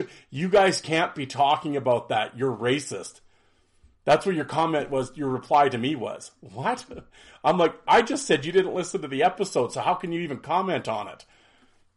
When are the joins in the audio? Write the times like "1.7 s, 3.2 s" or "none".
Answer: none